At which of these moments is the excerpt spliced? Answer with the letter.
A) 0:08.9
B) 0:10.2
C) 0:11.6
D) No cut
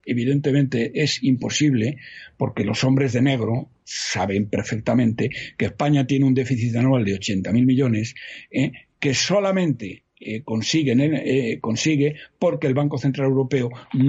D